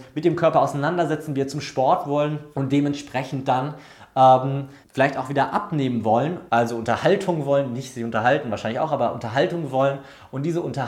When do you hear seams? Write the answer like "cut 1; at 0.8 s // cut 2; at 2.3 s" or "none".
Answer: cut 1; at 2.5 s // cut 2; at 4.8 s // cut 3; at 6.5 s